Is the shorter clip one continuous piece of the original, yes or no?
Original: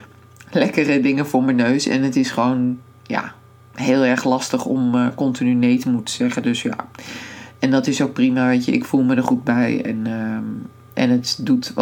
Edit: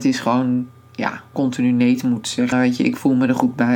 no